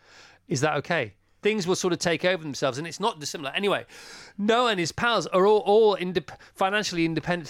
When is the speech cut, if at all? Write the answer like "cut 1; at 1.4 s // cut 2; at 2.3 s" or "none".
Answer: cut 1; at 1.4 s